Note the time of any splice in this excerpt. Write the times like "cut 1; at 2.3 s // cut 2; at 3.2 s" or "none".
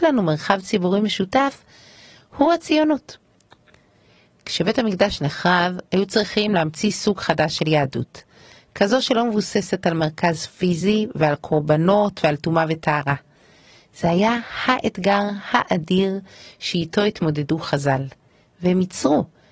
none